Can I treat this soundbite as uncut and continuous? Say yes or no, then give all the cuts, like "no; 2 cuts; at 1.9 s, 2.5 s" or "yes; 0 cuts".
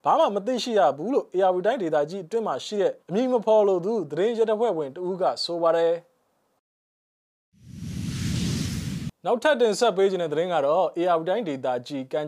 no; 2 cuts; at 3.0 s, 9.2 s